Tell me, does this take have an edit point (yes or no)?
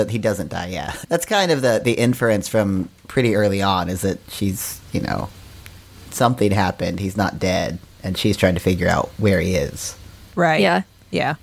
yes